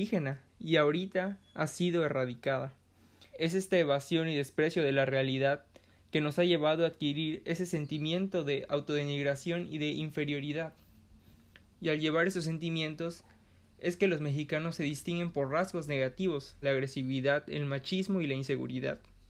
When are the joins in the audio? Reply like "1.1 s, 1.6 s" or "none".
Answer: 3.3 s, 16.6 s